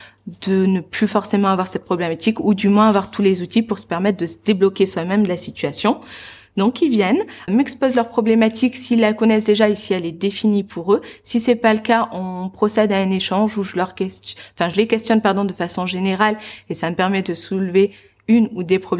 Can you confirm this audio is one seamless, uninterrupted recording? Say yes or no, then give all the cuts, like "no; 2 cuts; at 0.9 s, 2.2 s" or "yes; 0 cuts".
no; 1 cut; at 7.5 s